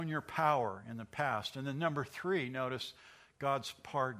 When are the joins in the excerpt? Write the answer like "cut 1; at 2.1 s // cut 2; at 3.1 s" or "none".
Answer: none